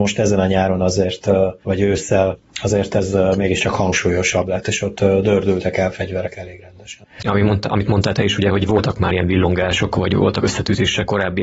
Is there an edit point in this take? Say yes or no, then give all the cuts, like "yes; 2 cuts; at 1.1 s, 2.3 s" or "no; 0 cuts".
yes; 1 cut; at 7.2 s